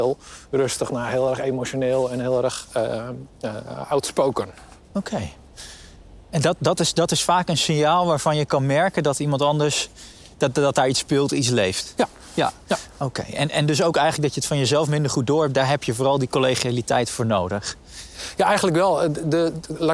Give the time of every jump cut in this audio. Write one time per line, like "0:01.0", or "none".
none

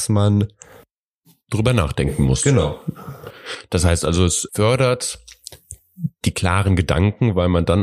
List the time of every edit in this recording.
0:04.5

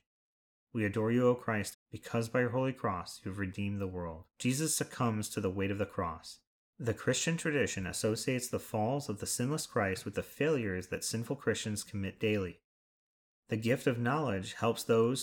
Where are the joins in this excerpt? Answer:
0:01.7
0:04.3

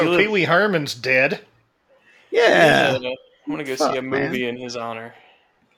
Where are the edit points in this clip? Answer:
none

